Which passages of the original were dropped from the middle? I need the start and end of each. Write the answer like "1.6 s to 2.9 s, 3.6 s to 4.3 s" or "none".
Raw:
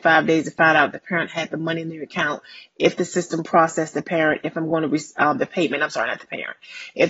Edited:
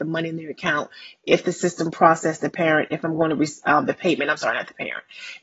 none